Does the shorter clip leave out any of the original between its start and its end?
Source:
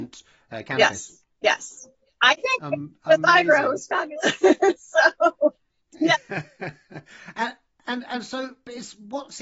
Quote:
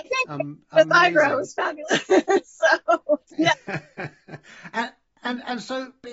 yes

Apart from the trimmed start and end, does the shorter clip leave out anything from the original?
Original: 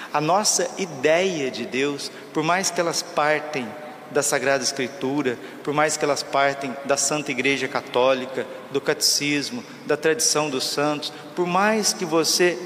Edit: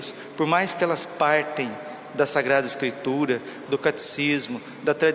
yes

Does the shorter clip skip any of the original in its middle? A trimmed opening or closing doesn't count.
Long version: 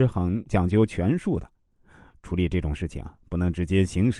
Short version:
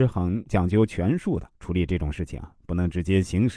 yes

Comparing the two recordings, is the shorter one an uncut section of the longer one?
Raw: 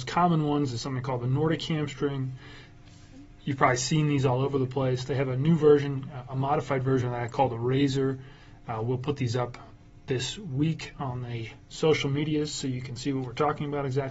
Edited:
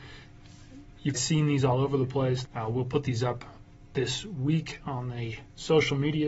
no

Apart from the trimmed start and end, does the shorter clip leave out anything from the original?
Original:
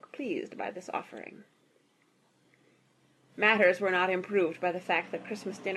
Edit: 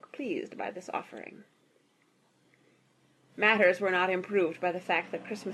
no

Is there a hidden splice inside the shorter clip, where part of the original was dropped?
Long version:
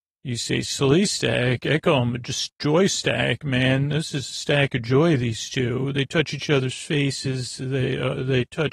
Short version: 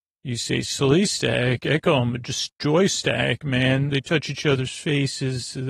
yes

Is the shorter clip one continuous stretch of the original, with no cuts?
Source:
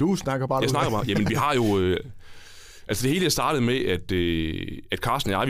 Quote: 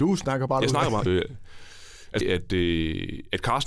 no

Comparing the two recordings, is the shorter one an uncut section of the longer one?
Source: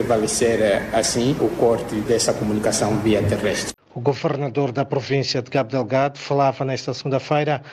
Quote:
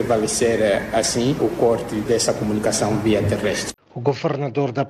yes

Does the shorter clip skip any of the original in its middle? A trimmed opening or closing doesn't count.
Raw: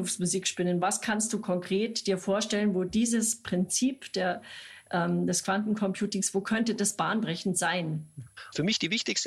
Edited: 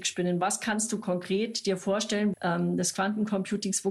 yes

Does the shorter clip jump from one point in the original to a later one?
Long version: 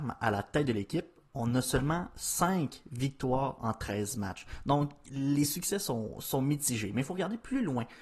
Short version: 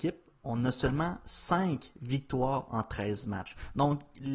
no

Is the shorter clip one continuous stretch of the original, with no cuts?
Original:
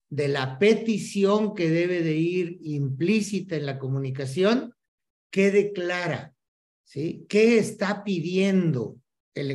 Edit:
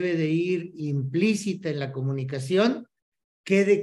yes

